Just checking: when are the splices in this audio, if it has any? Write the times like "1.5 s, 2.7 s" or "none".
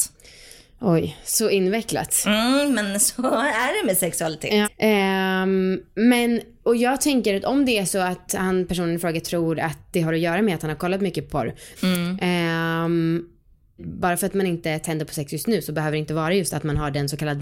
4.6 s, 11.8 s, 13.8 s